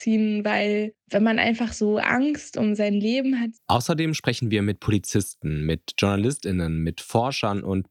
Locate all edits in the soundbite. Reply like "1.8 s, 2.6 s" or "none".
3.6 s